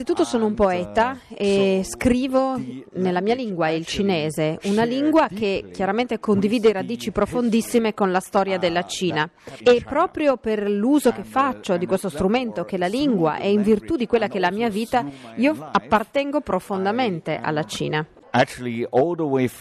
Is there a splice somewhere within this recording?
no; 0 cuts

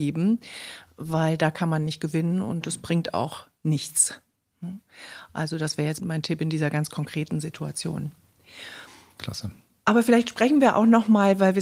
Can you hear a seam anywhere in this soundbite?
no; 0 cuts

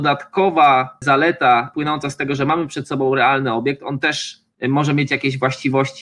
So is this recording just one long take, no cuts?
yes; 0 cuts

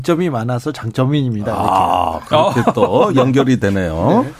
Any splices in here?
no; 0 cuts

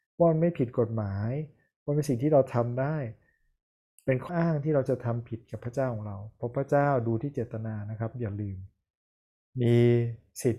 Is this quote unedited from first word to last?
no; 1 cut; at 4.3 s

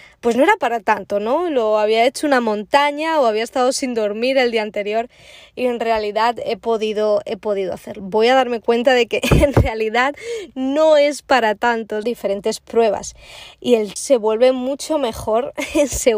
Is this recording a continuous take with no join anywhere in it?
no; 3 cuts; at 8.0 s, 12.0 s, 14.0 s

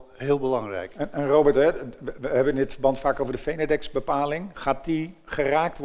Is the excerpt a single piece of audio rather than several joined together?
yes; 0 cuts

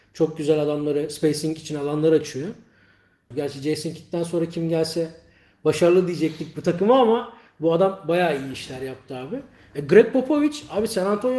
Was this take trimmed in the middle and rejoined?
yes; 1 cut; at 3.3 s

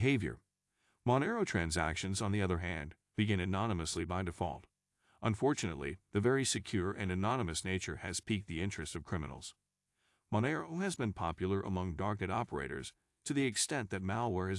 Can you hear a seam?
no; 0 cuts

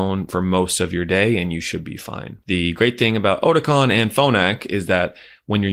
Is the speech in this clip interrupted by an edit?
yes; 1 cut; at 2.4 s

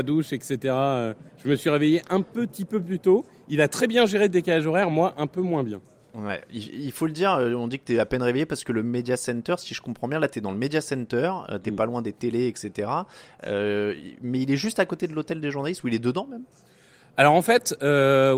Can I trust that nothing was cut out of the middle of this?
yes; 0 cuts

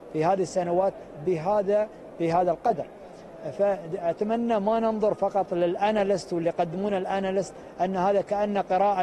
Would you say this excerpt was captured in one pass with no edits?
yes; 0 cuts

